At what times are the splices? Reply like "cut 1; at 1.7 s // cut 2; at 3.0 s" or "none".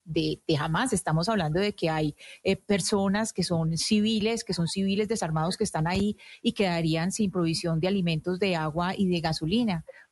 none